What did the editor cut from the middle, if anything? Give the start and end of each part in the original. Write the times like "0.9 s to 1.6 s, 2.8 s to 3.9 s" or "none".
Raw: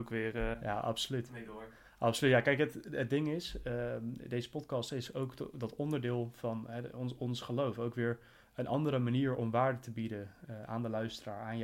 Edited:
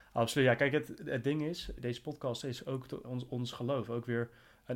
3.6 s to 4.3 s, 5.5 s to 6.9 s